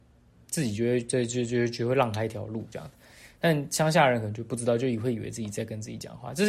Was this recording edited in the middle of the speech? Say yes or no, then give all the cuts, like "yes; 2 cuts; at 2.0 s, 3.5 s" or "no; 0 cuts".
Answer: no; 0 cuts